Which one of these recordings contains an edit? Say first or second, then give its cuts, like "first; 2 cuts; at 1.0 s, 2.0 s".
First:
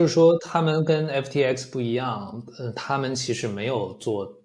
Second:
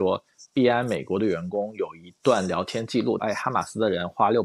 second; 1 cut; at 3.2 s